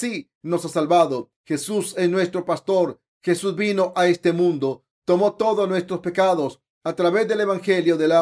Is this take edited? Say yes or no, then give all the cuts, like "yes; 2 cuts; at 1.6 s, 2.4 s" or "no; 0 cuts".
yes; 2 cuts; at 1.4 s, 3.1 s